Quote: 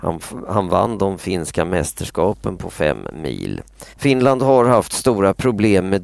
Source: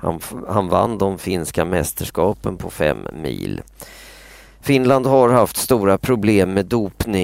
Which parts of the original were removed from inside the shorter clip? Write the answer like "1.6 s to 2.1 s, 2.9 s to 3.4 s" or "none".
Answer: 3.9 s to 4.5 s

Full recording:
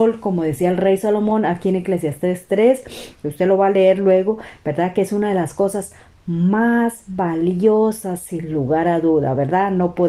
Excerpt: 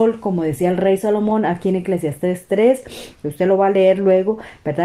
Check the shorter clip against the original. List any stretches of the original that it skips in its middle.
none

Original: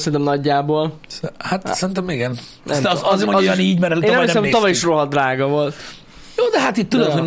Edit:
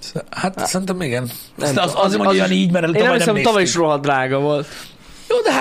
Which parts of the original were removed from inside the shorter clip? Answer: none

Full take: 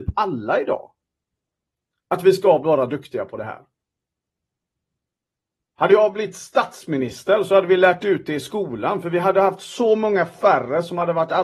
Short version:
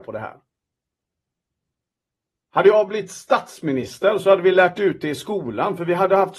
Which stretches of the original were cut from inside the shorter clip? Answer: none

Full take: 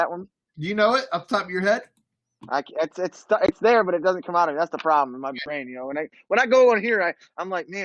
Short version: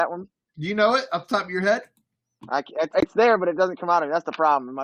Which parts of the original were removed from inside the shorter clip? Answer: 2.9 s to 3.4 s

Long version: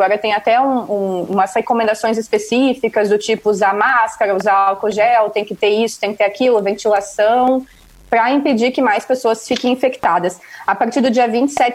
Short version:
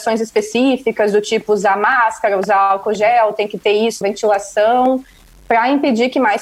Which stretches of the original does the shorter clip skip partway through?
6.0 s to 6.6 s

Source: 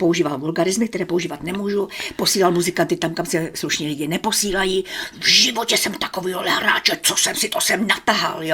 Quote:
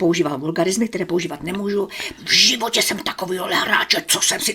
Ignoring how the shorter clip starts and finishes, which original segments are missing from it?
2.2 s to 5.1 s

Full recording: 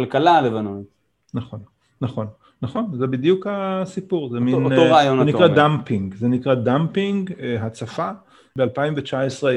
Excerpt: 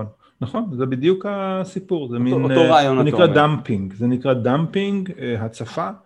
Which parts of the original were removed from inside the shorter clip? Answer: none

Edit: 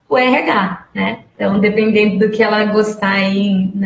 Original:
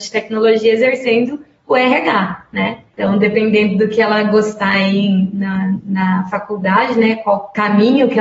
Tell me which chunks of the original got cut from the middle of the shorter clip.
none

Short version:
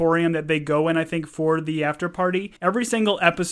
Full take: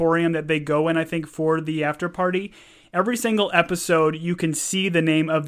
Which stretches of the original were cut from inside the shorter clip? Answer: 2.6 s to 2.9 s

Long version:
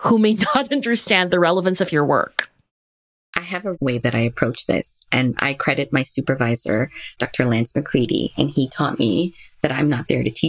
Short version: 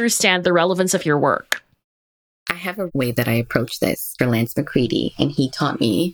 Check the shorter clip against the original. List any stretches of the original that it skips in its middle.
5.1 s to 7.4 s

